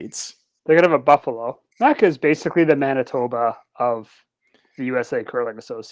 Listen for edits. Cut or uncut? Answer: cut